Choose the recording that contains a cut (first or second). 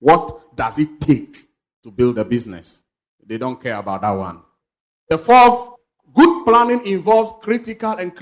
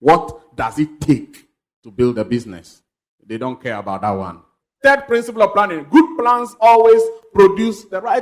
second